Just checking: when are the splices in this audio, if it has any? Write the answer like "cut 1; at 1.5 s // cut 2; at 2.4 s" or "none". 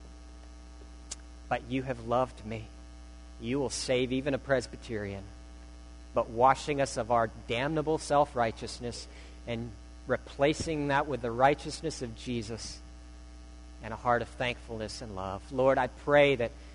cut 1; at 1.4 s // cut 2; at 6.1 s